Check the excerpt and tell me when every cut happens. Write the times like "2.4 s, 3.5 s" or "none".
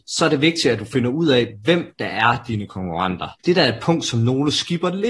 3.4 s